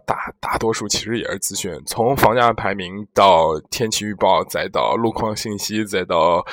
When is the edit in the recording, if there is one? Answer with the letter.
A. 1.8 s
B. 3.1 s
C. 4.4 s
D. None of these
D